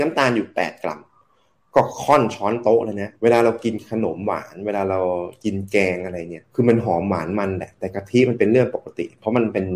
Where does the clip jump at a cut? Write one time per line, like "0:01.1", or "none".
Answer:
0:03.2
0:06.5